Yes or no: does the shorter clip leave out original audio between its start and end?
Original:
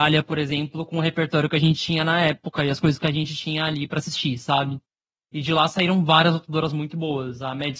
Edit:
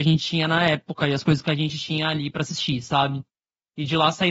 no